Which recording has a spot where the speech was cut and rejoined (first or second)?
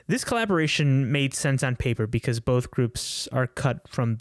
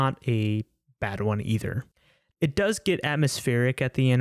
second